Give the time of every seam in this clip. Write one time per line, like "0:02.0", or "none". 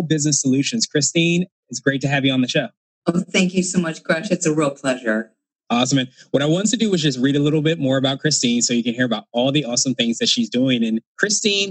none